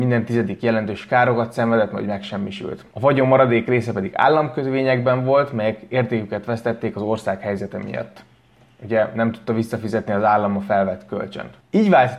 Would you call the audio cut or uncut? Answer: cut